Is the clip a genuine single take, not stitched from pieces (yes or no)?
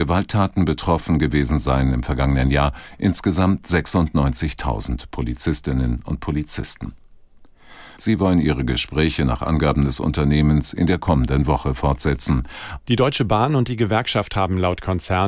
no